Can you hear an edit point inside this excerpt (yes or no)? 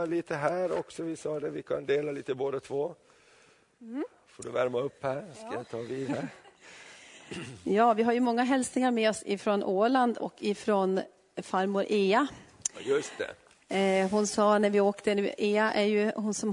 no